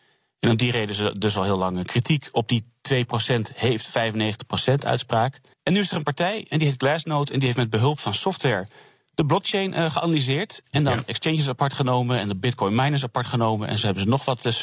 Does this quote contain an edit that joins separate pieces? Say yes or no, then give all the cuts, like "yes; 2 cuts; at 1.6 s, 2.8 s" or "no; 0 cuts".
yes; 1 cut; at 5.5 s